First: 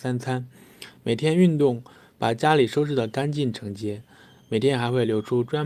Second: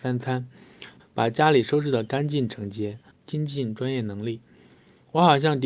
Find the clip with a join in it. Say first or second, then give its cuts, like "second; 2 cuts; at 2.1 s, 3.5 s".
second; 2 cuts; at 1.0 s, 3.1 s